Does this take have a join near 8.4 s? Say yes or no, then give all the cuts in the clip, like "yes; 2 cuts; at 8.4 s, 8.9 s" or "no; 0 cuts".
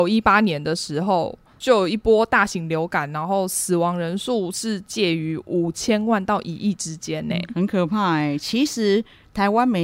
no; 0 cuts